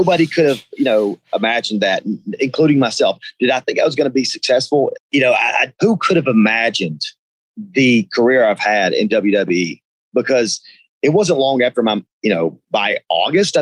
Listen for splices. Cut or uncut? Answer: cut